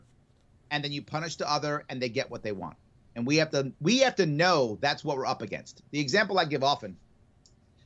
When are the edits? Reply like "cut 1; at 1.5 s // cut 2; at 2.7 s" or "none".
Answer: none